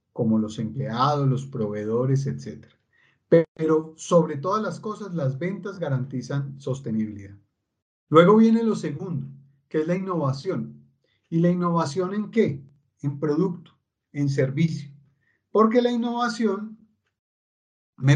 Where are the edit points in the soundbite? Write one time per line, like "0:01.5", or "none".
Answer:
none